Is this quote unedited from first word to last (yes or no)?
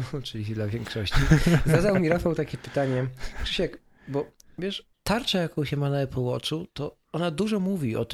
no